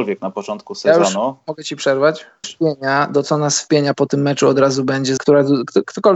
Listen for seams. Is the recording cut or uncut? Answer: cut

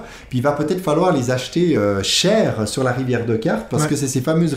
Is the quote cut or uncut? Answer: uncut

